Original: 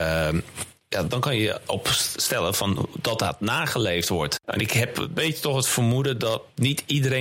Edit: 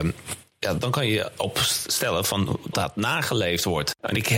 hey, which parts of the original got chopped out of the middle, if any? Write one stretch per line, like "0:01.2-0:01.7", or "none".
0:03.0-0:03.2